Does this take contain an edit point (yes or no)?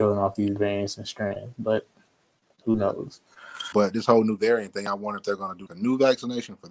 yes